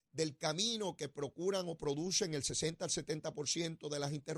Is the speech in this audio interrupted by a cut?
no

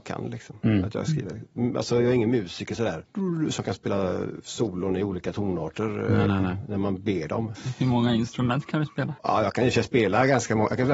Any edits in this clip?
no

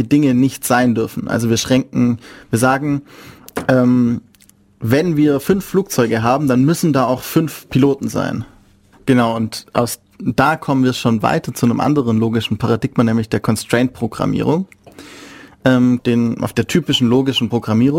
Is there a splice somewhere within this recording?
yes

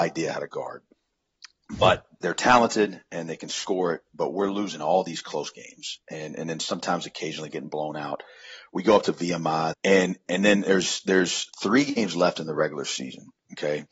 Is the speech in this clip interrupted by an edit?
yes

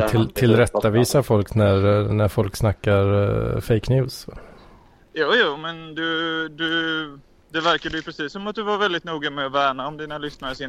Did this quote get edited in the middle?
no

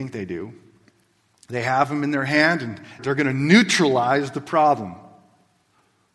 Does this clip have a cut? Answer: yes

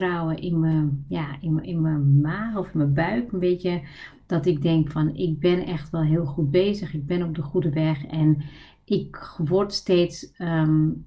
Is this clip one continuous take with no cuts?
no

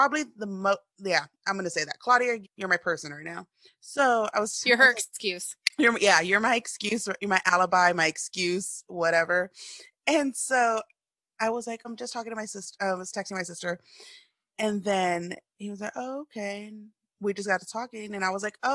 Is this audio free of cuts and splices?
no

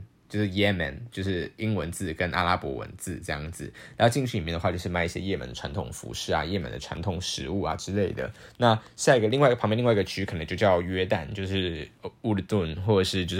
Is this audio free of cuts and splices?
yes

